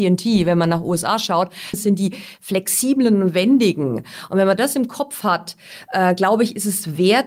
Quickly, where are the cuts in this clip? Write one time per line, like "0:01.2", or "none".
0:01.7